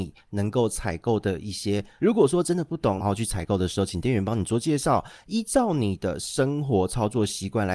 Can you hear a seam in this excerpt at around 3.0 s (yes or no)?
yes